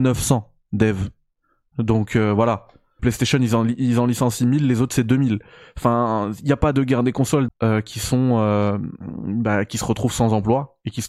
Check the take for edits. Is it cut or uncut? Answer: cut